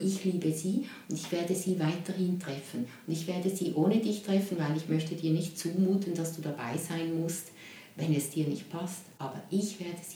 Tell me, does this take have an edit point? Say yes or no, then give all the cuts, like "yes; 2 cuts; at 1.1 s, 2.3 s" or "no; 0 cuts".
no; 0 cuts